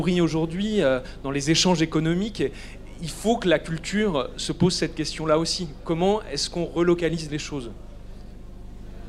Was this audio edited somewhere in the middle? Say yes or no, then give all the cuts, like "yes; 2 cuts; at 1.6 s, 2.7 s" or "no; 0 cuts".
no; 0 cuts